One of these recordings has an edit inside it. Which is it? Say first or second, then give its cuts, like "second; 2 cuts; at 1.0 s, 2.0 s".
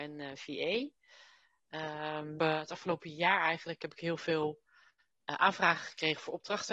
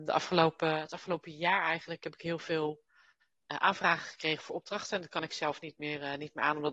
first; 1 cut; at 2.4 s